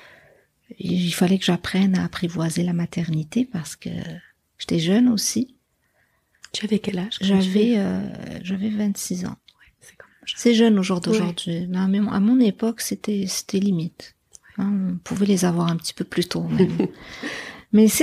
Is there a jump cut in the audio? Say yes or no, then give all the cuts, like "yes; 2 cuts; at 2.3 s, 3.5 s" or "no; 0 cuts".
no; 0 cuts